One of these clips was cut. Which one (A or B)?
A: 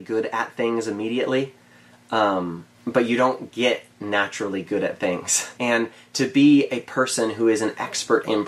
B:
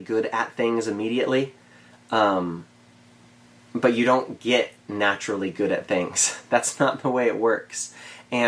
A